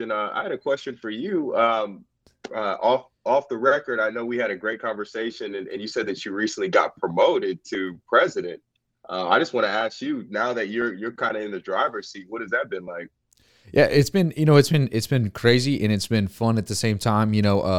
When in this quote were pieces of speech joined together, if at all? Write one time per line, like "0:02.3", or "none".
none